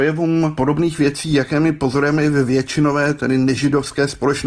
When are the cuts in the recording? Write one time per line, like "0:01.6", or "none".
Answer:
none